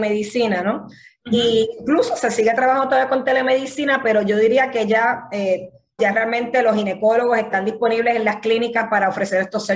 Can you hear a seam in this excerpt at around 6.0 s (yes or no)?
yes